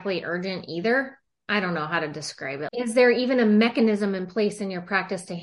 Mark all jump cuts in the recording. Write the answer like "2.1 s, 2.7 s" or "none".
2.7 s

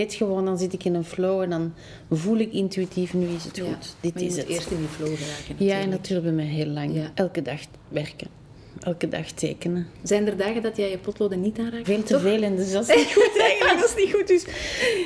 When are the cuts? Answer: 7.1 s, 11.8 s

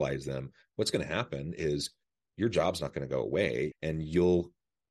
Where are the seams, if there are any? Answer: 3.7 s

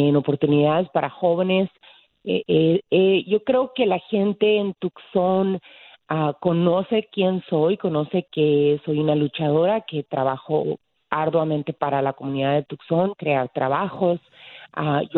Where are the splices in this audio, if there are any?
13.2 s

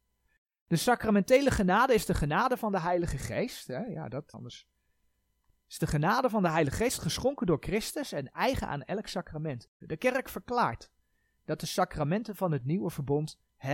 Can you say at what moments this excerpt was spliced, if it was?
4.3 s, 9.8 s

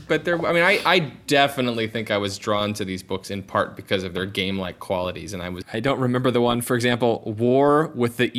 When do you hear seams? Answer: 5.6 s

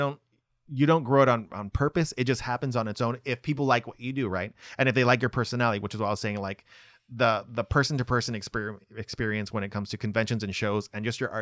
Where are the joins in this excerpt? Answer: none

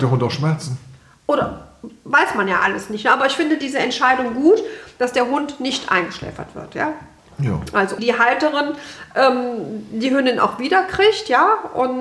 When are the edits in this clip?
8.0 s

